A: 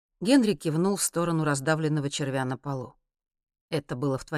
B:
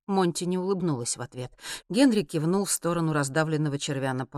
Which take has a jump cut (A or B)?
B